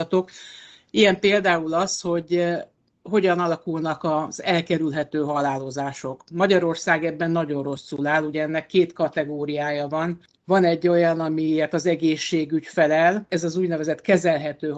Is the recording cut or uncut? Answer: uncut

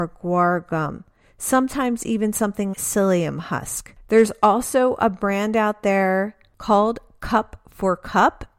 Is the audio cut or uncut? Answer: cut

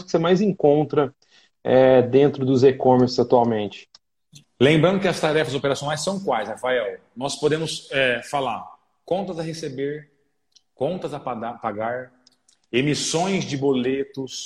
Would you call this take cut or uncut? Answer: cut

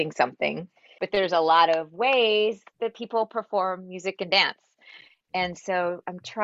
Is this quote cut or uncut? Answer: cut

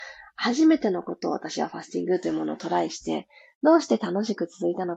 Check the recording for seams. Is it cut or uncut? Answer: uncut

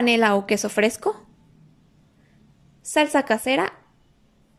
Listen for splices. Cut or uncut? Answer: uncut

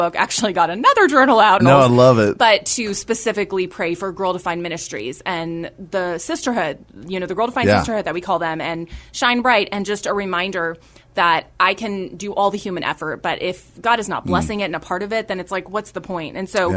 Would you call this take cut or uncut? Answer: cut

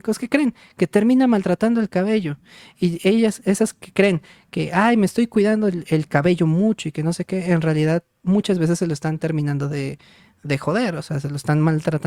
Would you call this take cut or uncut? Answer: uncut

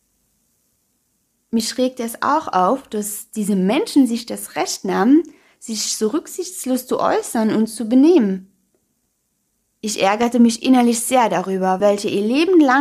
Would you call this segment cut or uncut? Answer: cut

